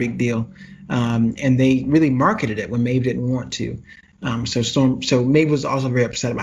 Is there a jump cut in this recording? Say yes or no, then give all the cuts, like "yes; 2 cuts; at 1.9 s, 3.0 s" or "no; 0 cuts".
no; 0 cuts